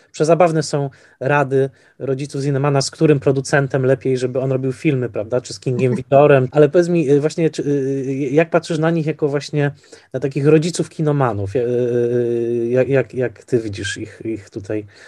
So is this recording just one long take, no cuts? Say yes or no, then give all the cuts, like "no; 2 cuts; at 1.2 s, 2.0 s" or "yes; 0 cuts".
no; 1 cut; at 6.5 s